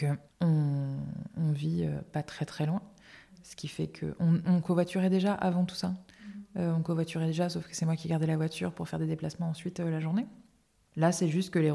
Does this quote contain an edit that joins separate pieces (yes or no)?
no